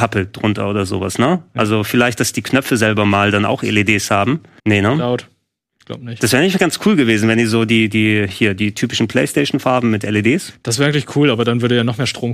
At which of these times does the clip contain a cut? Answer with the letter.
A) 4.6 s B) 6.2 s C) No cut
A